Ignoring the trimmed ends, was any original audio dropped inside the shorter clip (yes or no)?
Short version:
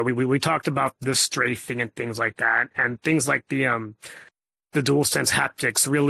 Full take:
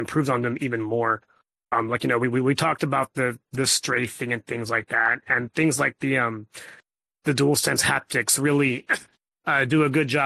yes